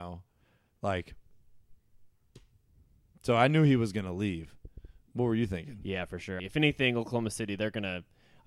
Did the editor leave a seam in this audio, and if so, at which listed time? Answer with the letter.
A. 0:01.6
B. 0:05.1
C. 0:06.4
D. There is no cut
C